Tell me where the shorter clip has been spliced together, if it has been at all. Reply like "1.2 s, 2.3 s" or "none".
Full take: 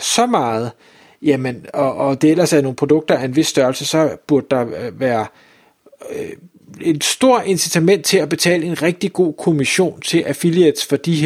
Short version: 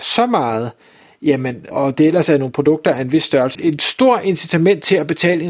1.7 s, 3.5 s